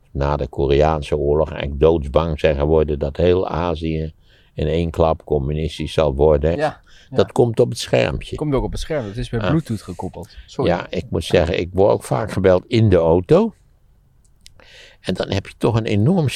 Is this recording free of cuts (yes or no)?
no